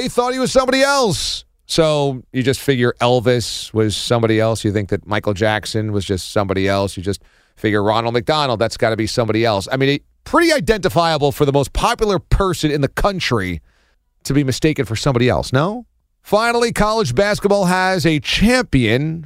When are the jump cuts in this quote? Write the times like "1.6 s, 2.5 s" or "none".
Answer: 1.5 s